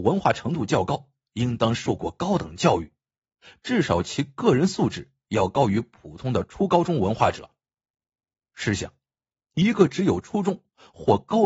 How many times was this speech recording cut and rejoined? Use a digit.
0